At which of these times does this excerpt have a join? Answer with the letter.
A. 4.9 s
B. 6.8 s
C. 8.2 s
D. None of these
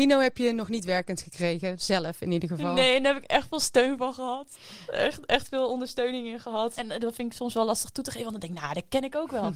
B